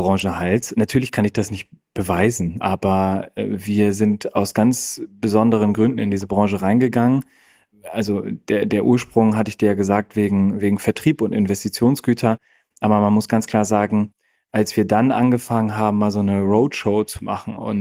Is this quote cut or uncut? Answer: uncut